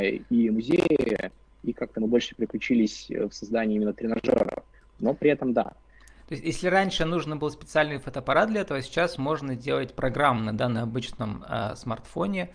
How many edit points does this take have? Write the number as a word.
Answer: zero